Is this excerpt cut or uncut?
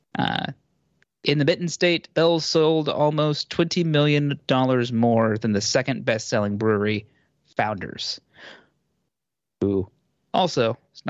uncut